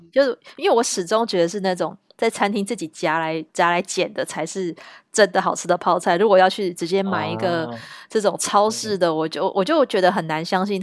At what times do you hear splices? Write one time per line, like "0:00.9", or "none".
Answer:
0:03.5